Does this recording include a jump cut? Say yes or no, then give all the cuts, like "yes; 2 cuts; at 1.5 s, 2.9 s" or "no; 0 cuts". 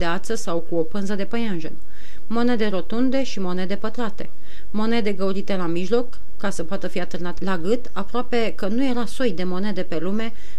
yes; 1 cut; at 7.4 s